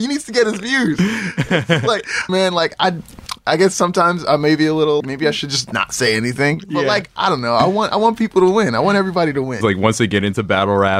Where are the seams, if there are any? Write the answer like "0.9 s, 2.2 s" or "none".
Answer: 2.3 s, 5.0 s, 9.6 s